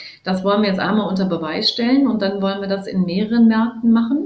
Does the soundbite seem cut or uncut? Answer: uncut